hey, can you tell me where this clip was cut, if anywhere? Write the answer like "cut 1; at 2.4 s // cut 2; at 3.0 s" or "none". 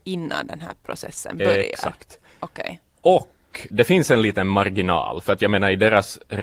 cut 1; at 3.7 s